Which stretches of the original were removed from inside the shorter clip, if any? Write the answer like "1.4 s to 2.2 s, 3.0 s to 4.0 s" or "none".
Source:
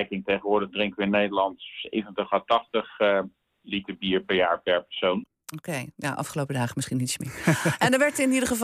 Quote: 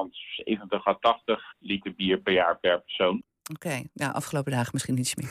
3.0 s to 3.5 s